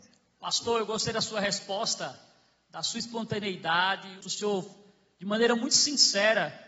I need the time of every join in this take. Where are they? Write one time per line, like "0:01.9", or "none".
0:04.2